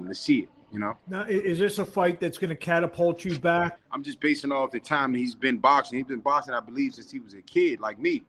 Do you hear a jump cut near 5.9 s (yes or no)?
no